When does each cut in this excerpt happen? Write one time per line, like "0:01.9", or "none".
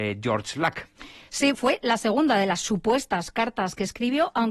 0:01.5